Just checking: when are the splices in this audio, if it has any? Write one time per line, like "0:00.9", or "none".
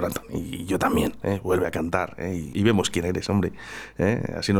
0:02.5